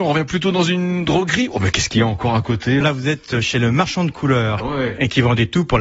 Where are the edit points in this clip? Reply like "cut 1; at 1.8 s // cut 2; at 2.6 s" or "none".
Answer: cut 1; at 2.8 s // cut 2; at 4.6 s